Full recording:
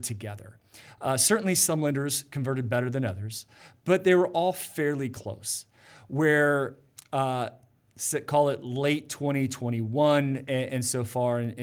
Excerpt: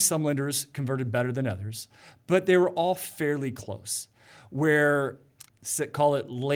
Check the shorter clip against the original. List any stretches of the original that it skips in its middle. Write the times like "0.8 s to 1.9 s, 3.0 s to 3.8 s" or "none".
7.1 s to 7.8 s